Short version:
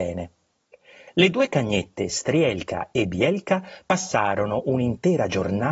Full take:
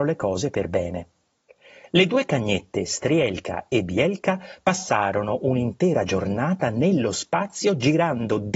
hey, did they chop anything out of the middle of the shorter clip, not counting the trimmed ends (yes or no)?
no